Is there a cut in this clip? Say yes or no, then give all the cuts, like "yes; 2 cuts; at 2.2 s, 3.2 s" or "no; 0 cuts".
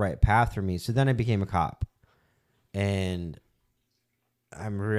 no; 0 cuts